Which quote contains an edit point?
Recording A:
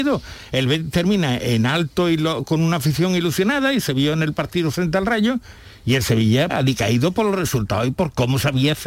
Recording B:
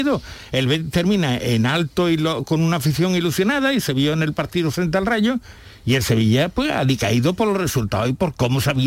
A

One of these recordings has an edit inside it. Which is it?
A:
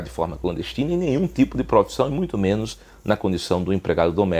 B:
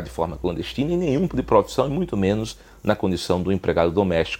B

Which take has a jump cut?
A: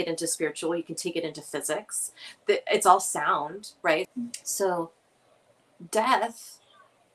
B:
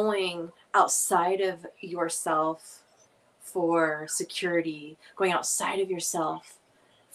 A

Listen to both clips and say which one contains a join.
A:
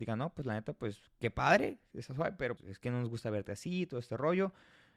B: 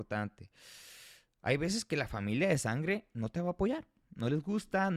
A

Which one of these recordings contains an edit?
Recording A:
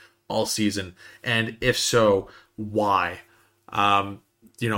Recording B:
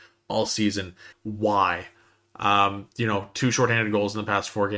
B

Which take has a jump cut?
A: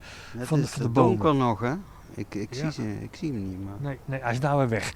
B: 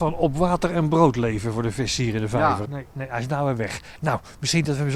B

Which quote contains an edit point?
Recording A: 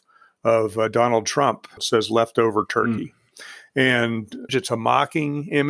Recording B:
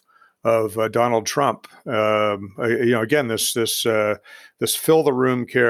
A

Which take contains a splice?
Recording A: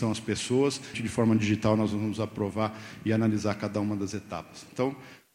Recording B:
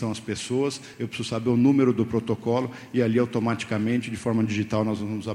A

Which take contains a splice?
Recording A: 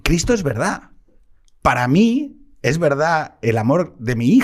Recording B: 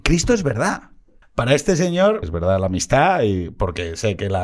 B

